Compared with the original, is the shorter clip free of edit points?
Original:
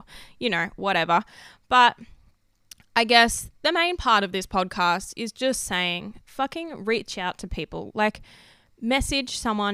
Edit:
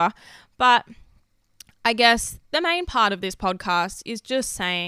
yes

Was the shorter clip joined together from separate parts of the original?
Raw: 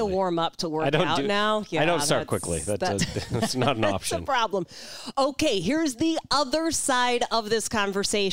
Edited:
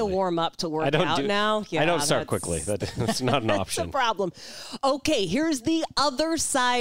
yes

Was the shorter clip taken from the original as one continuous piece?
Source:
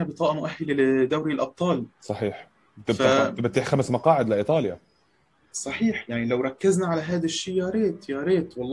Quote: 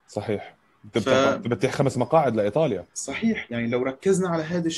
no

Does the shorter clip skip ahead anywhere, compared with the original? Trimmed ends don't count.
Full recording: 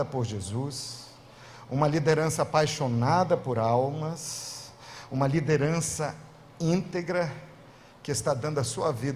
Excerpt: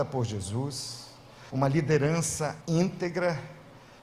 yes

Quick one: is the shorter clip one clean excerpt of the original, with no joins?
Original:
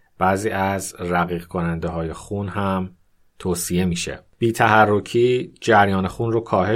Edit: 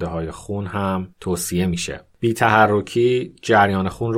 no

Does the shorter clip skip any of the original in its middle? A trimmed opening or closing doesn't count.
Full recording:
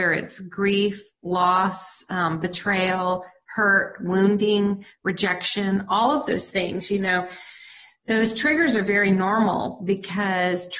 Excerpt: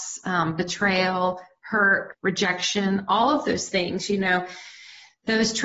yes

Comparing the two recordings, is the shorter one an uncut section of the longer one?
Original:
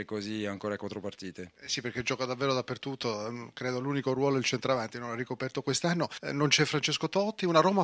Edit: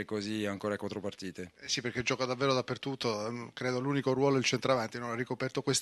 yes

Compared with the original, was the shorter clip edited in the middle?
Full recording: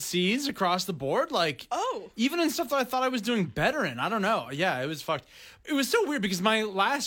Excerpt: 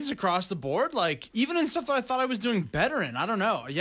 yes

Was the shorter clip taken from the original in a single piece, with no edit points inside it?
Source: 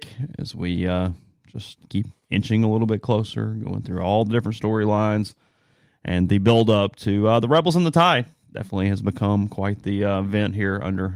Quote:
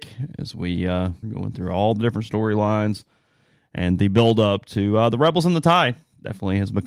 no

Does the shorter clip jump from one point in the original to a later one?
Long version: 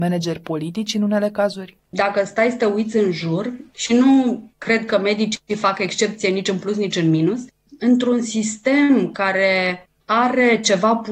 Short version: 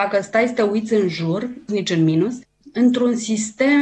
yes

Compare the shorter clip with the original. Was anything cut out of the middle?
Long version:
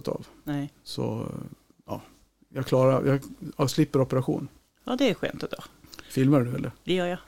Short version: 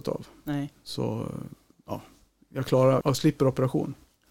yes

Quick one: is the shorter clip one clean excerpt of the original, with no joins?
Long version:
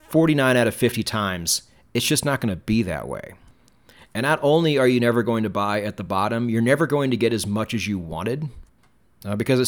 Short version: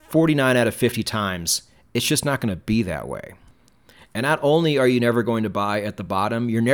yes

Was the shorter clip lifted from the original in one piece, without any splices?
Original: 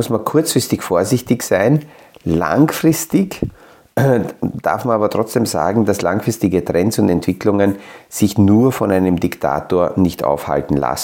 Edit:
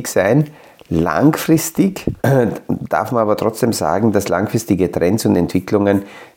no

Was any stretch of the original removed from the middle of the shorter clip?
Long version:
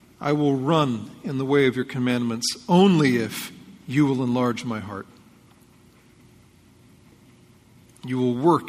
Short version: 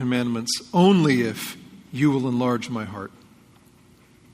no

